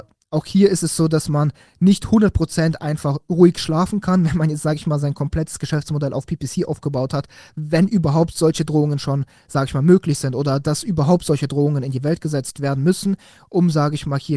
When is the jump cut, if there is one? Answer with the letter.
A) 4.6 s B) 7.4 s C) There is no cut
C